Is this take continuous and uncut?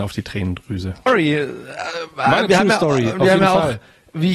no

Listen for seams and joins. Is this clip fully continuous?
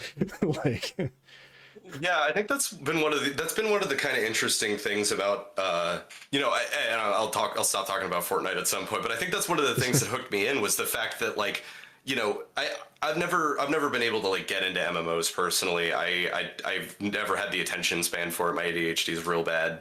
yes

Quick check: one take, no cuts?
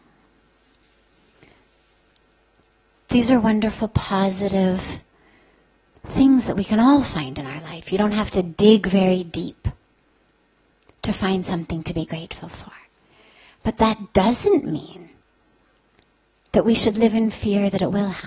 yes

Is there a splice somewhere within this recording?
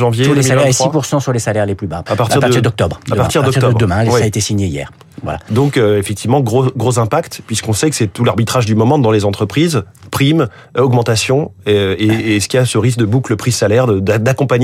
yes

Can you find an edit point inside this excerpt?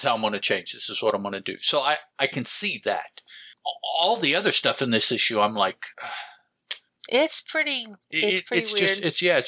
yes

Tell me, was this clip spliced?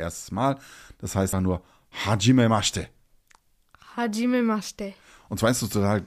yes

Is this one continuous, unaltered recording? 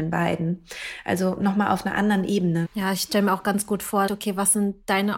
no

